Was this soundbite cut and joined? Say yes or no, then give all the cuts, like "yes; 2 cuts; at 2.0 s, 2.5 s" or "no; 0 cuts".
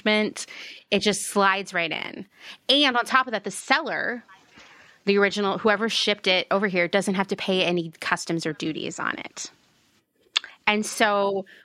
no; 0 cuts